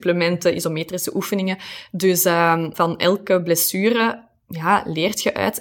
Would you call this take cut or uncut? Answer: cut